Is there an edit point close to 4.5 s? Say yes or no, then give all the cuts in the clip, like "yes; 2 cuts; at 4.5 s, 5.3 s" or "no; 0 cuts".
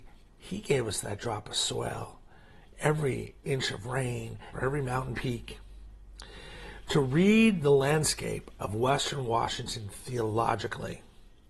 yes; 1 cut; at 4.5 s